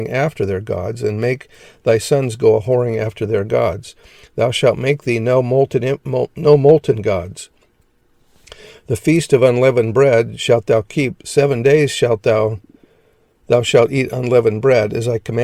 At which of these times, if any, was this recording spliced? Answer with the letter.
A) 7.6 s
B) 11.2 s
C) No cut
C